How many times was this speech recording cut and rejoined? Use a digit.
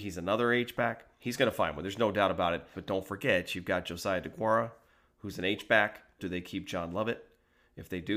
3